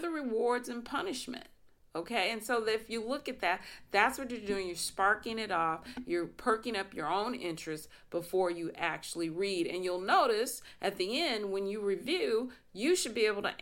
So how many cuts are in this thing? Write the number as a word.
zero